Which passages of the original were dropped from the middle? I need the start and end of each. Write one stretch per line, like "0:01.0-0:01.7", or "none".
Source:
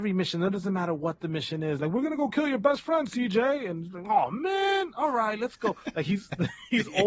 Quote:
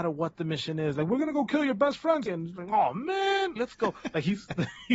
0:03.1-0:03.6
0:04.9-0:05.4